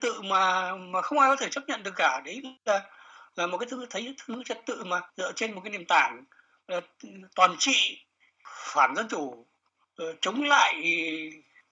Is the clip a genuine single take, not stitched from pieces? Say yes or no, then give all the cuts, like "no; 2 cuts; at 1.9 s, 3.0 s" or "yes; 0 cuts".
no; 2 cuts; at 2.6 s, 5.1 s